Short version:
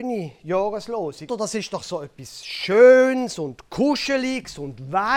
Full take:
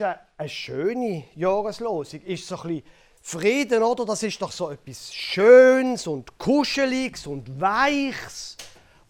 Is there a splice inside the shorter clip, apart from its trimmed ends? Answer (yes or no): yes